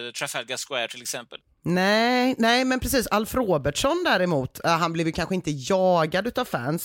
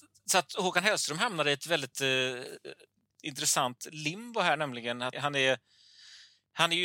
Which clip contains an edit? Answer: second; 1 cut; at 5.1 s

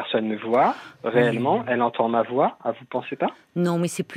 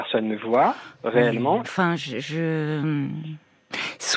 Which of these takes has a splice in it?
second; 1 cut; at 1.6 s

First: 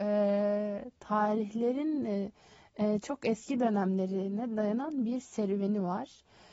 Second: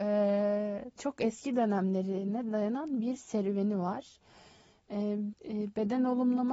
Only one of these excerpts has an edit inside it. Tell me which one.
second; 2 cuts; at 1.0 s, 5.3 s

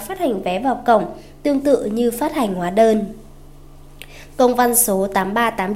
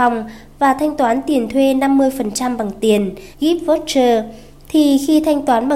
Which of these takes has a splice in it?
second; 1 cut; at 3.3 s

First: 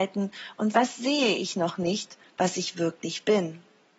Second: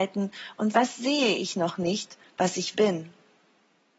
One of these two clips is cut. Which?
second; 1 cut; at 2.7 s

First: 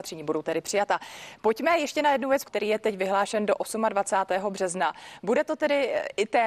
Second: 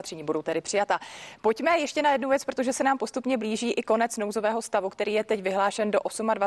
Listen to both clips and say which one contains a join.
first; 1 cut; at 2.5 s

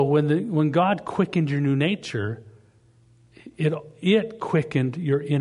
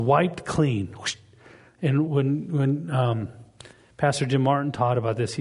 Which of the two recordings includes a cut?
second; 1 cut; at 2.1 s

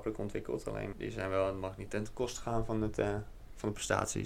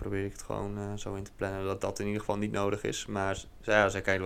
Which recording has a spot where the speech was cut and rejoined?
first; 1 cut; at 0.9 s

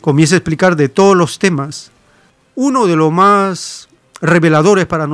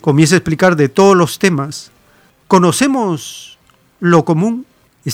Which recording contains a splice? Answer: second; 1 cut; at 2.4 s

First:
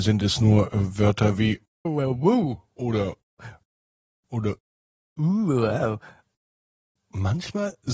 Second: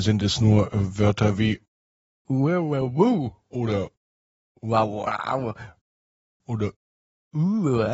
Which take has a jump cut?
first; 2 cuts; at 1.8 s, 3.4 s

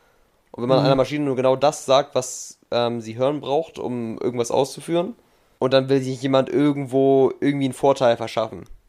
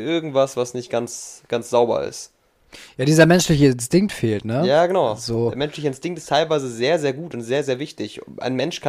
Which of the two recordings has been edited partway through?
first; 1 cut; at 5.6 s

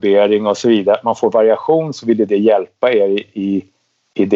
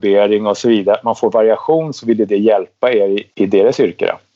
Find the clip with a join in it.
second; 1 cut; at 3.3 s

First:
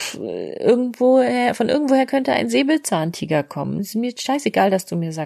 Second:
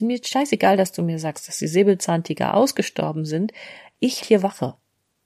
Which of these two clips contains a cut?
second; 1 cut; at 4.2 s

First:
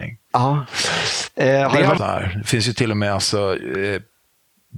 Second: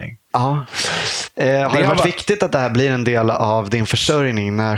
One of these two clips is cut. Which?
first; 1 cut; at 2.0 s

